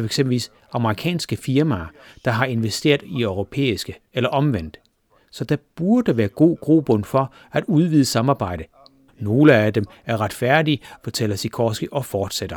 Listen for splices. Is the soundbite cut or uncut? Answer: cut